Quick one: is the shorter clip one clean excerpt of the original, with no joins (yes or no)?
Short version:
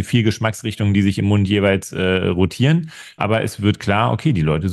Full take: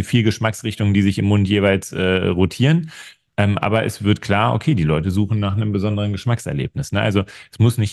no